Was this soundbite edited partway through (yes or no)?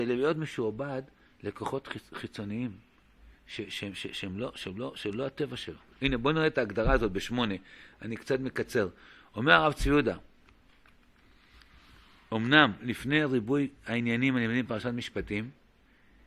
no